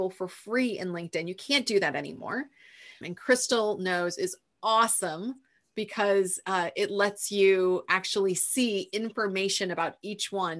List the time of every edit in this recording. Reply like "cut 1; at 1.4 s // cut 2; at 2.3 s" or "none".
cut 1; at 3.0 s